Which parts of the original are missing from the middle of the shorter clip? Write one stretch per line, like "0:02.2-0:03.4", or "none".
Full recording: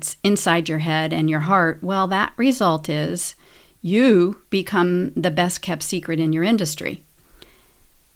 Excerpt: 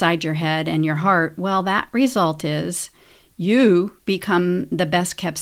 none